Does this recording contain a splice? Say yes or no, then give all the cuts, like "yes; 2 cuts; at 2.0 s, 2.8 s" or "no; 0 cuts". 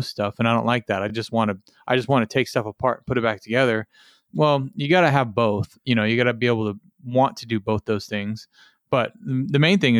no; 0 cuts